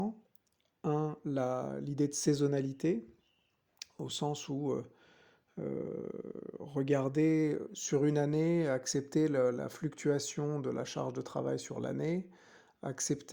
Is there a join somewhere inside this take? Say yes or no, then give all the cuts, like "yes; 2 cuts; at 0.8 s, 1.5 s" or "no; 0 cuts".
no; 0 cuts